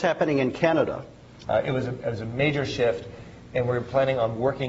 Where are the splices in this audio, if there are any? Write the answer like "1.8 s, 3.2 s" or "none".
1.4 s